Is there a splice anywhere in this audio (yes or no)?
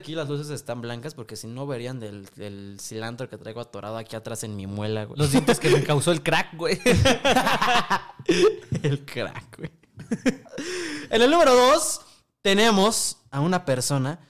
no